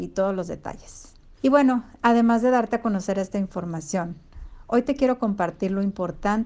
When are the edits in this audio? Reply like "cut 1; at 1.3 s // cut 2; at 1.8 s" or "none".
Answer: cut 1; at 1.4 s